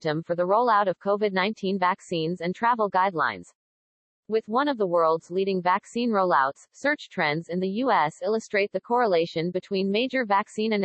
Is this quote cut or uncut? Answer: uncut